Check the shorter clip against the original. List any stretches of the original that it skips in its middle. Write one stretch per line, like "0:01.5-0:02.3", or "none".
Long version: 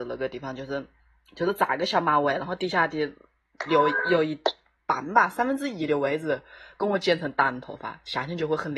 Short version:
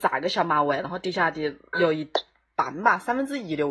0:03.3-0:04.0